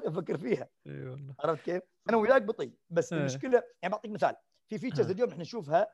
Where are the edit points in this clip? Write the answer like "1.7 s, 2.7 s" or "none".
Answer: 2.1 s